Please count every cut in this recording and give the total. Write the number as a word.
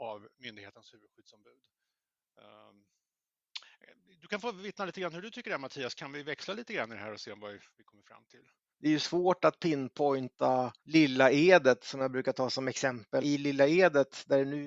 three